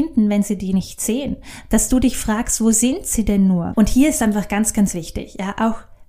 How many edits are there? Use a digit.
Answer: 1